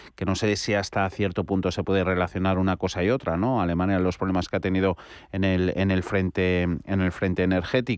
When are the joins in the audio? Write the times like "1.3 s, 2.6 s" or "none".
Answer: none